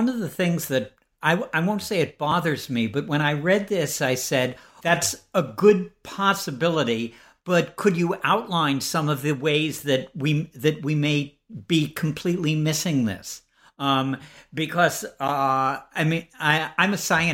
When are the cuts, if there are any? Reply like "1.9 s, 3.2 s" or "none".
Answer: 4.8 s